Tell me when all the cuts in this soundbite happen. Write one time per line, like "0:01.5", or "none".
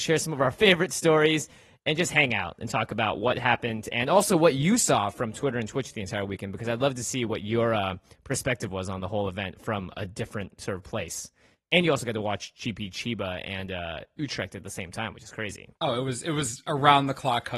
0:15.7